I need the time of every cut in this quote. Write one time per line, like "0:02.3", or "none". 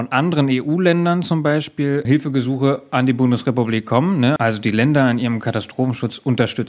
0:02.0
0:04.4